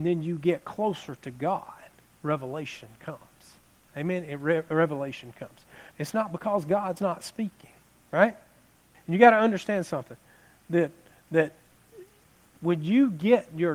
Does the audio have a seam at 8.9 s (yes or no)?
yes